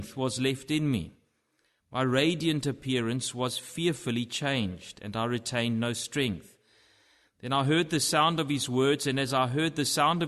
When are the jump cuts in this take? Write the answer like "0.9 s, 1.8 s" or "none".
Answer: none